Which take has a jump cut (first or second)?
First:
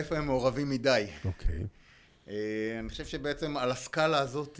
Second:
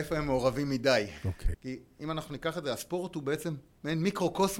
second